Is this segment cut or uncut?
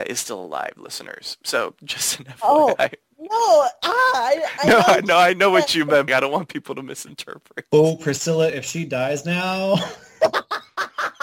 cut